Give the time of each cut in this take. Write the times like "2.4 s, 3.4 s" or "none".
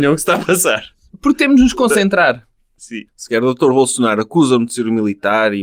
3.1 s

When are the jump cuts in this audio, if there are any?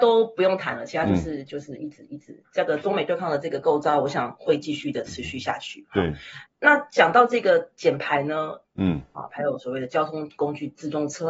6.5 s, 8.6 s

